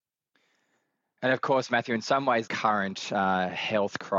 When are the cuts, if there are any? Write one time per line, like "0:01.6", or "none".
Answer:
0:02.5